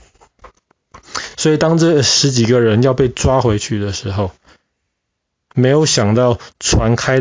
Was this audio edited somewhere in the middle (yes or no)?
no